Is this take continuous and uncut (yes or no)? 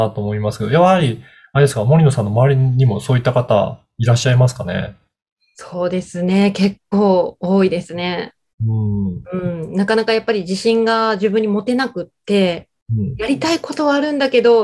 yes